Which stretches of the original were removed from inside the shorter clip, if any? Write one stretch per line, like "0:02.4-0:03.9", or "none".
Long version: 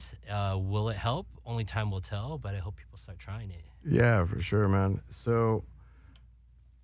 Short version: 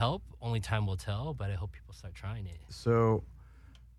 0:03.7-0:05.1